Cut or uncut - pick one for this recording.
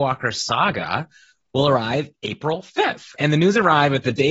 uncut